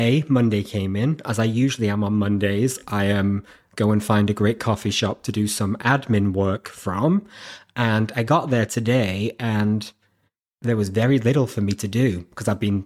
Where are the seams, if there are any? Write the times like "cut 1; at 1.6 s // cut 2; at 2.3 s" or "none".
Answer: none